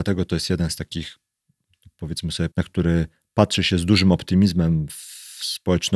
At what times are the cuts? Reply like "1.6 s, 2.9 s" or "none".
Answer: 2.5 s